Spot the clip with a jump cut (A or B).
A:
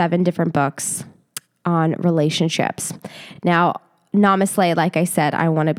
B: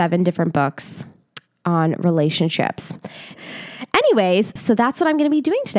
B